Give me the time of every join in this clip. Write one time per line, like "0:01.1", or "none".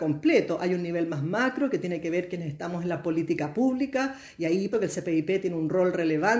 0:04.7

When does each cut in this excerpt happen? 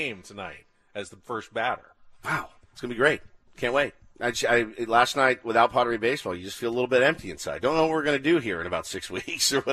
none

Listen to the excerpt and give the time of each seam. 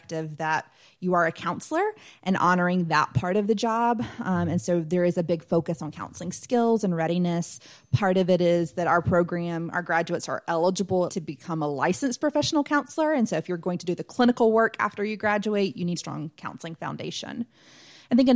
0:11.1
0:16.0

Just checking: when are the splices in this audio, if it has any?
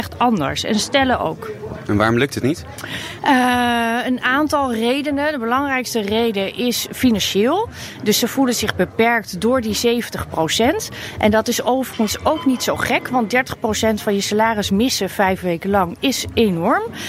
none

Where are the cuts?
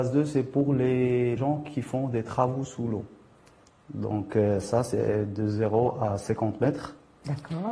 0:01.4

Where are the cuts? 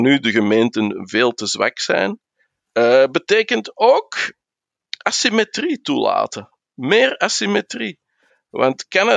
none

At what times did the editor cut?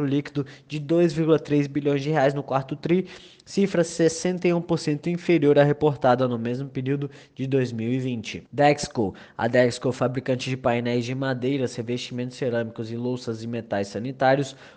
0:08.5

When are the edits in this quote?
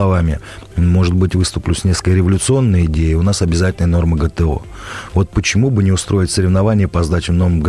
none

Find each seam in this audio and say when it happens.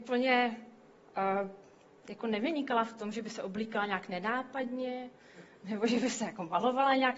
none

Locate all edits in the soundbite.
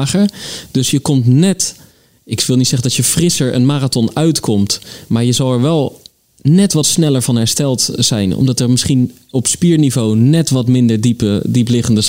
none

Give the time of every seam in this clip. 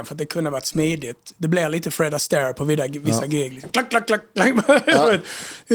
none

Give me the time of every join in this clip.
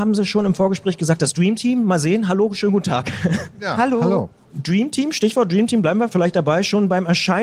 none

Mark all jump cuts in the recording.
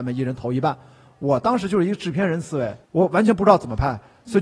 0:02.8

